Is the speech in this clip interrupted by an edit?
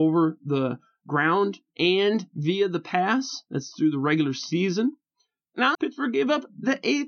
yes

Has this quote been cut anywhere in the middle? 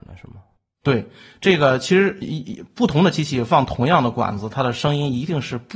yes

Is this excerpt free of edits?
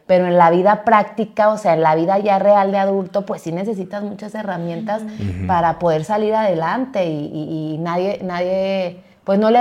yes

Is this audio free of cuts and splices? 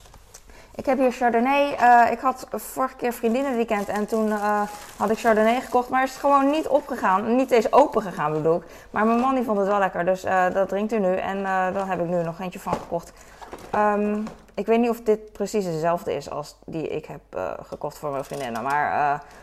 yes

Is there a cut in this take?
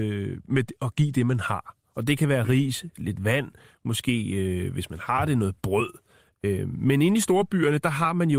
no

